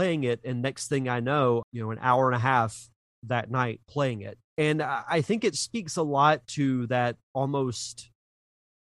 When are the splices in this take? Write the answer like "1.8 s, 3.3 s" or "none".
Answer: 1.6 s, 4.5 s